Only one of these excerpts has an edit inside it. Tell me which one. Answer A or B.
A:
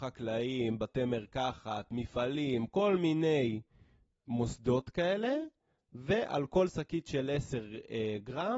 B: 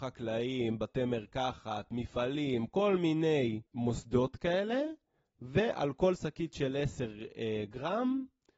B